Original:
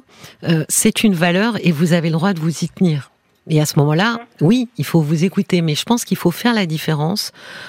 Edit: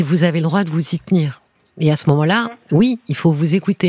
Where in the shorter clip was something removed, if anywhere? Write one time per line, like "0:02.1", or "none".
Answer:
none